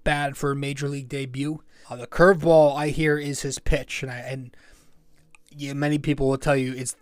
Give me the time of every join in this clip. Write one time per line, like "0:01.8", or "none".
0:01.8